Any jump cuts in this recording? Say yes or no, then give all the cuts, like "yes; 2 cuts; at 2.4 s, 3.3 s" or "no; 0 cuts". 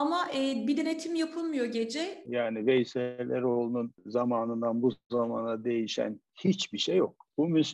yes; 1 cut; at 2.3 s